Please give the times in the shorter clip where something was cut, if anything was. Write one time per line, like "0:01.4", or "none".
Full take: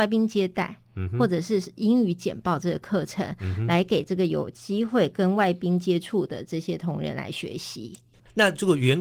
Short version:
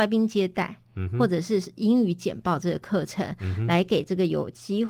none